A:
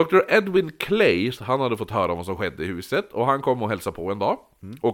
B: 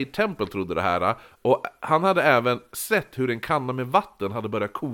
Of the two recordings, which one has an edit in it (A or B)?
A